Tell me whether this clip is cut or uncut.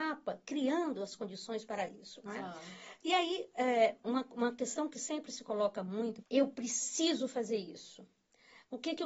cut